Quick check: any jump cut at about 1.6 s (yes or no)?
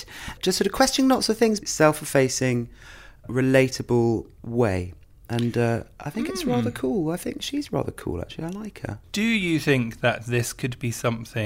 yes